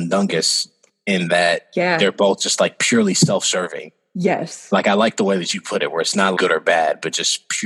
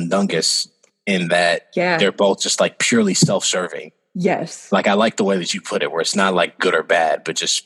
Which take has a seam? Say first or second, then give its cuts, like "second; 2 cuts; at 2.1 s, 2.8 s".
first; 1 cut; at 6.3 s